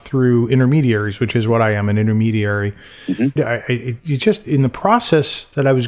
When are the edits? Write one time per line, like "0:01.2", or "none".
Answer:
0:03.4